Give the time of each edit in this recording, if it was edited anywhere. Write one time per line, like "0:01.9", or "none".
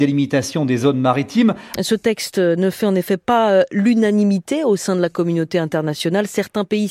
0:01.7